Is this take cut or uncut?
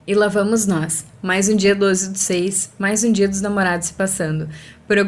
uncut